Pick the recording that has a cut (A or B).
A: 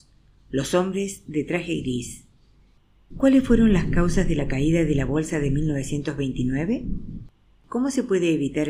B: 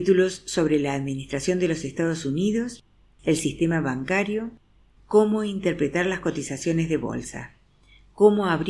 A